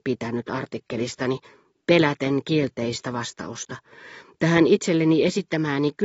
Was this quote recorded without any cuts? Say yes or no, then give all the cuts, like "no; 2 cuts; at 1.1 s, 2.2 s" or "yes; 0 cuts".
yes; 0 cuts